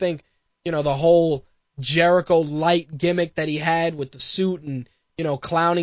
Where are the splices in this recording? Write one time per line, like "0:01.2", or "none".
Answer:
none